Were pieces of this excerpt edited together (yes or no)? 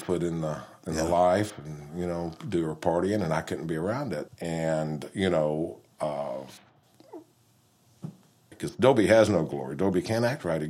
yes